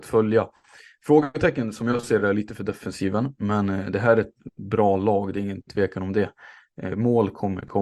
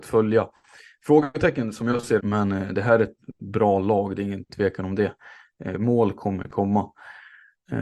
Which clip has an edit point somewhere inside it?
second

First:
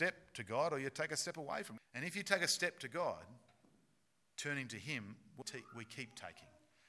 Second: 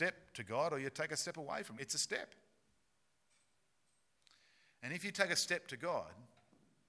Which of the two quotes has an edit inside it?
first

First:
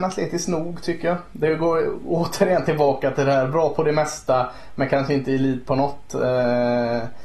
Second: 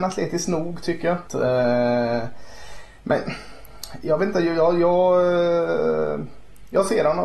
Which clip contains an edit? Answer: second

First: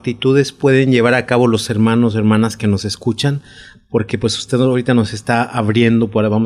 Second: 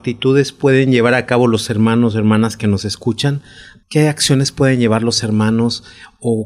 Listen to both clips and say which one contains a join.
second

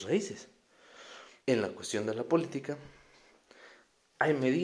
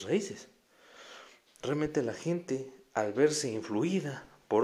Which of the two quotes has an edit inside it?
first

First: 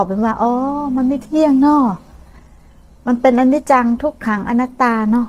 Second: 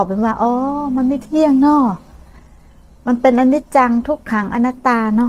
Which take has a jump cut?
first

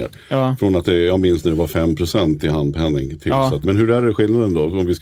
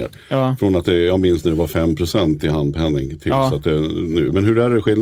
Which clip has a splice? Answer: first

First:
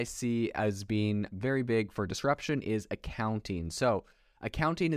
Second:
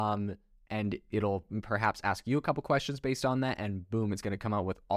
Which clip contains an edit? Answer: first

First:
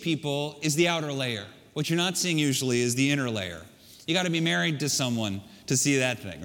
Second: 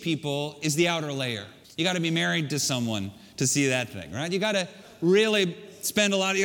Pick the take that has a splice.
second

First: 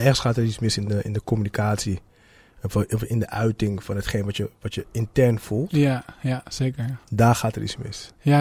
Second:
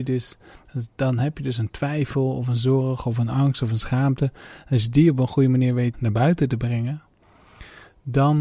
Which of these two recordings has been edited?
second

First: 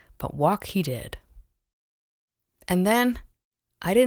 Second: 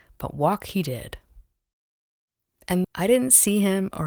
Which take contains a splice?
second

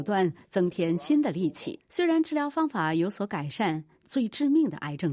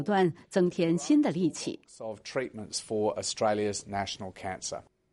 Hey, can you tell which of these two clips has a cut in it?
first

